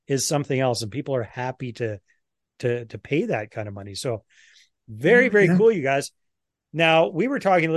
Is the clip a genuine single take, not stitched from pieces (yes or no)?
yes